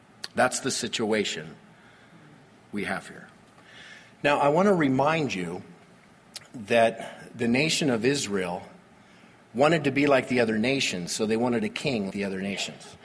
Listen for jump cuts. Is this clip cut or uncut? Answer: cut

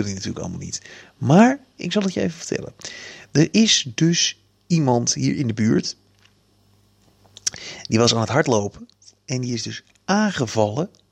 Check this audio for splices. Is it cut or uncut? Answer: uncut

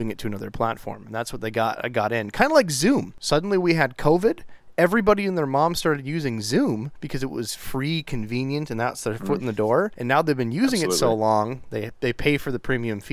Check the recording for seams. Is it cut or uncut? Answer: uncut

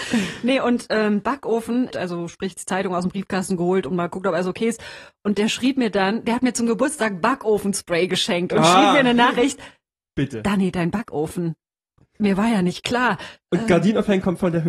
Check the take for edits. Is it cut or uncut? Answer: cut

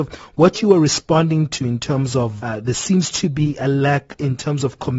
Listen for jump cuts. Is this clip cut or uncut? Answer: cut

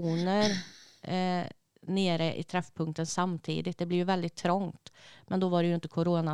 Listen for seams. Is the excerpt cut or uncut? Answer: uncut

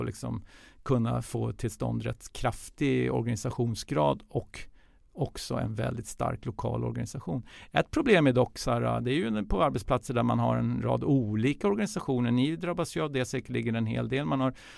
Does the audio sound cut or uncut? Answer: uncut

